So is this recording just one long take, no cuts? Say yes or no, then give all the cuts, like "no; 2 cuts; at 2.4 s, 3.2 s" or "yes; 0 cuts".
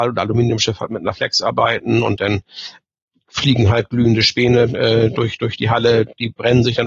yes; 0 cuts